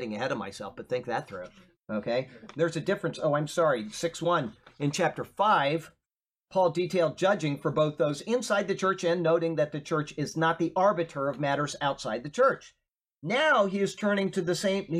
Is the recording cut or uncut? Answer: uncut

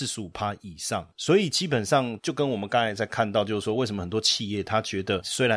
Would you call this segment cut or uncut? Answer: uncut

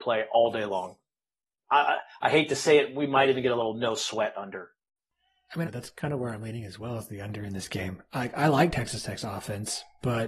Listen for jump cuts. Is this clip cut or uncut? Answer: cut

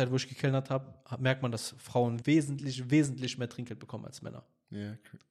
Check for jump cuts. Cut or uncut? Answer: cut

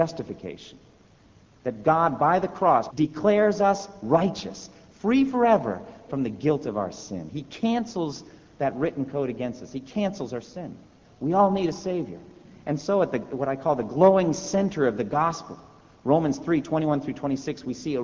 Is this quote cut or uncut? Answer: cut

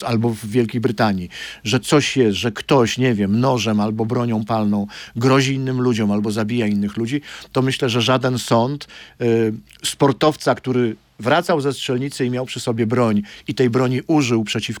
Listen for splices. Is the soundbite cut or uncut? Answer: uncut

